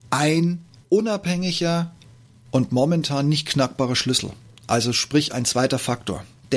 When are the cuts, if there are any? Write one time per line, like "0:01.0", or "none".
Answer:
none